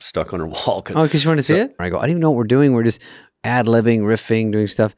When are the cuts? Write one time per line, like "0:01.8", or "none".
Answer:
0:01.8